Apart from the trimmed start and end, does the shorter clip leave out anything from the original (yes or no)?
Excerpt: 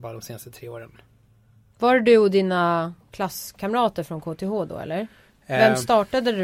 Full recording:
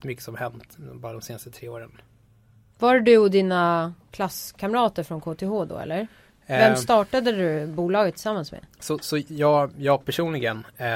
no